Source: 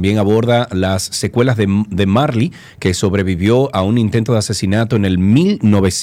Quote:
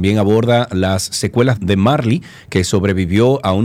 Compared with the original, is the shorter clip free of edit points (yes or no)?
no